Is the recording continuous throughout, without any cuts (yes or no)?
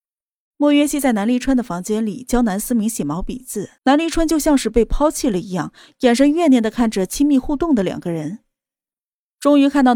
no